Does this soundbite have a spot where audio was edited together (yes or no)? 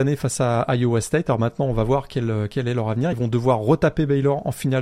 no